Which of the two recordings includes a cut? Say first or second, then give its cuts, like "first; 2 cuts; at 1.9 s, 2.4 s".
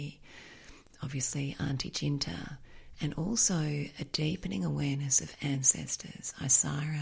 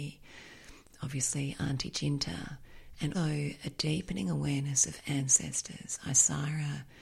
second; 1 cut; at 3.1 s